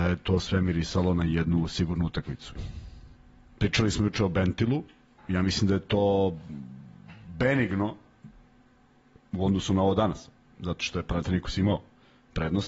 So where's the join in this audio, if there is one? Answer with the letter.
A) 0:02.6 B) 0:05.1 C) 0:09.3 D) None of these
A